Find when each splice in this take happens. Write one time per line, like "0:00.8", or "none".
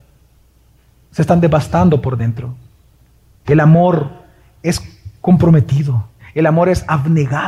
0:03.4
0:06.2